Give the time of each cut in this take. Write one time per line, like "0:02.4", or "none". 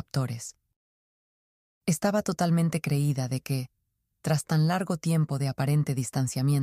none